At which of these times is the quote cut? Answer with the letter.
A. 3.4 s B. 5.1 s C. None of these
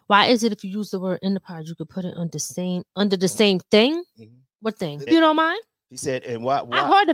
B